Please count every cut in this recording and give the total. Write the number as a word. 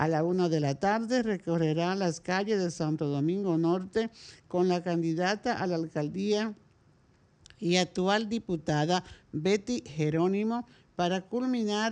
zero